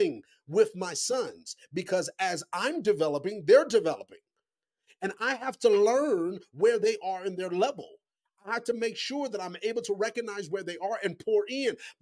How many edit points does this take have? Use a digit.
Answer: 0